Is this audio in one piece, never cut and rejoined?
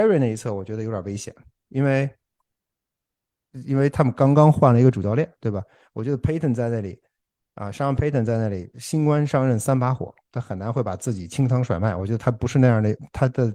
yes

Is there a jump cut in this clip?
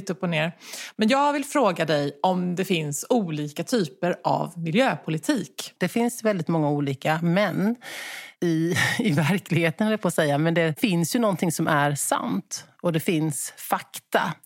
yes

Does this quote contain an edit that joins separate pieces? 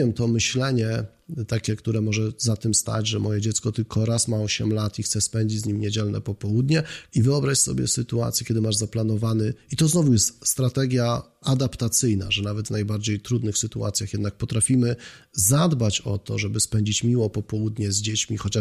yes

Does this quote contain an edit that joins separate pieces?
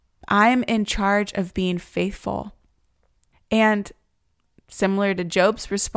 yes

